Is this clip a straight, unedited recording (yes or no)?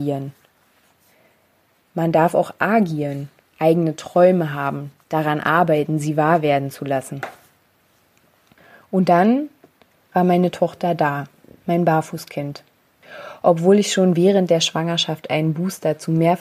yes